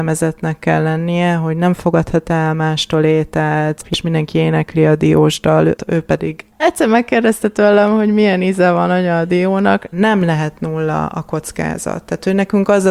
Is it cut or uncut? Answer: cut